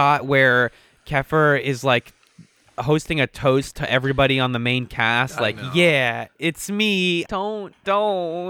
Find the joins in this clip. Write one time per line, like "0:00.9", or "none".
0:07.2